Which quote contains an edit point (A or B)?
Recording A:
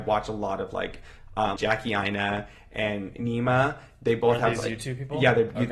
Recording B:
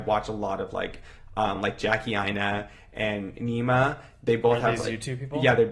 A